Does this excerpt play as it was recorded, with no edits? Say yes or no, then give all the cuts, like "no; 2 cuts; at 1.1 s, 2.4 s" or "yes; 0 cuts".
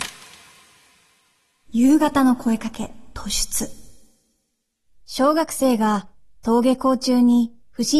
yes; 0 cuts